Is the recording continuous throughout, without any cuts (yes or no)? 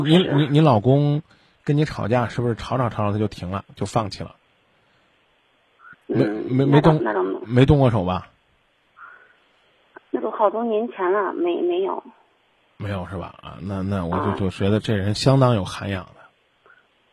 no